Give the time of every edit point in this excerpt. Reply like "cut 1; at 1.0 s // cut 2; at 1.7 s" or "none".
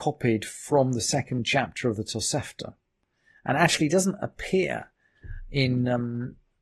none

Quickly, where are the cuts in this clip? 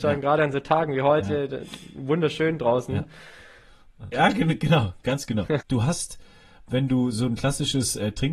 cut 1; at 4.1 s // cut 2; at 5.6 s

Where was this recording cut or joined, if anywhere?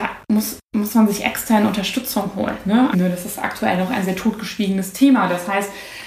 cut 1; at 2.9 s

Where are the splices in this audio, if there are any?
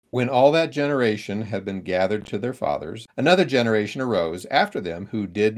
cut 1; at 3.1 s

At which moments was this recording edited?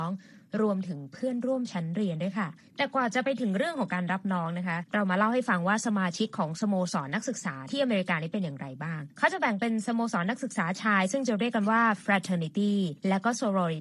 none

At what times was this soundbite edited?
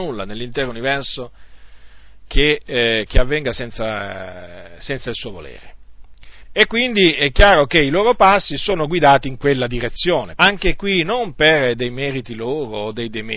cut 1; at 6.4 s // cut 2; at 10.4 s

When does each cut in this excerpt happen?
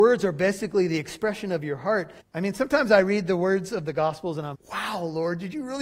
cut 1; at 2.2 s // cut 2; at 4.5 s

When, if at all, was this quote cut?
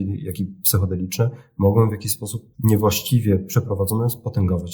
cut 1; at 2.5 s

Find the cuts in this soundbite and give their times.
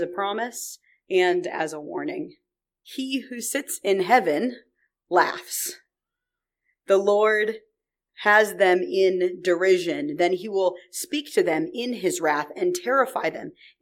cut 1; at 2.8 s

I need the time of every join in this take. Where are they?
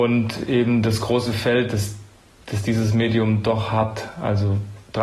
none

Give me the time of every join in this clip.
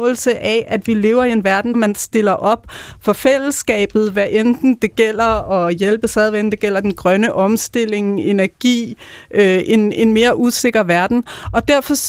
cut 1; at 1.7 s

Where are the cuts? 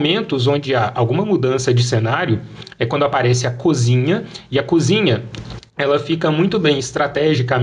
none

